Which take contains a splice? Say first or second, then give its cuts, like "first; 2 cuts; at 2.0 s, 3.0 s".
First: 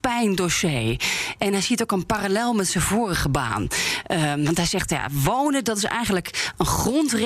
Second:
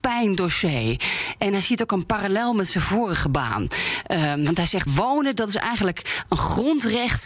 second; 1 cut; at 4.9 s